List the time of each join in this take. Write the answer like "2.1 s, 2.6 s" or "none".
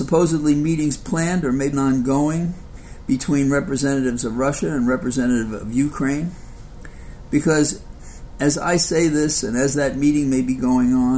1.7 s, 7.3 s